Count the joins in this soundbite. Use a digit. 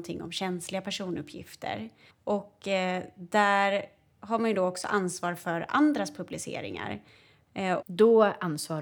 2